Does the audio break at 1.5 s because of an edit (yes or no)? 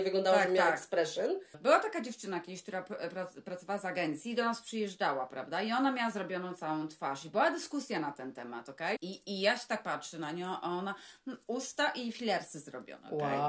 yes